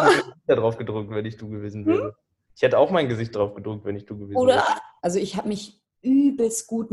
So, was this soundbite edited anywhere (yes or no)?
yes